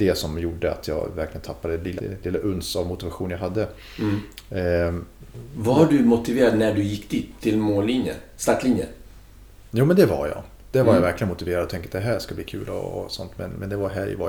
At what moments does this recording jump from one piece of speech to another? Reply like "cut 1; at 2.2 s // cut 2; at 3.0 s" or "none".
cut 1; at 2.0 s